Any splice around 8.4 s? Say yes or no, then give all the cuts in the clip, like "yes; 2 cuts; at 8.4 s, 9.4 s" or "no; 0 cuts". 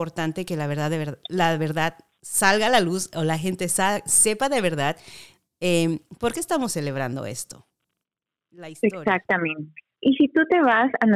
no; 1 cut; at 10.0 s